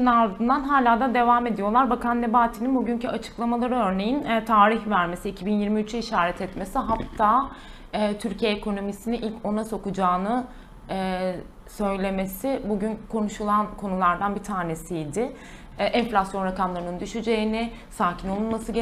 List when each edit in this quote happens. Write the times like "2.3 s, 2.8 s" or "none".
15.7 s